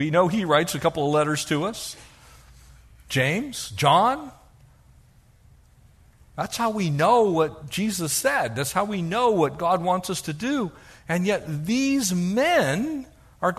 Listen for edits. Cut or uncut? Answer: uncut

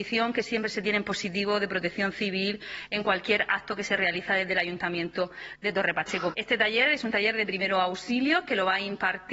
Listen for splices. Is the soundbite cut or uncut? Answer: cut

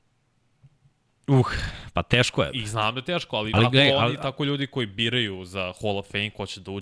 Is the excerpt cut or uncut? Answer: cut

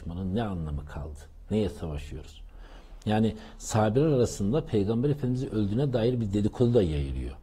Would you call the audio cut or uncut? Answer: uncut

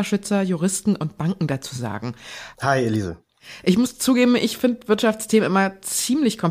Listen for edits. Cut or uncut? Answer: cut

